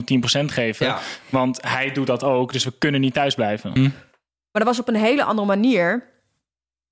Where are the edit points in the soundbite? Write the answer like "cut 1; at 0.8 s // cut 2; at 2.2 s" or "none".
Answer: cut 1; at 3.8 s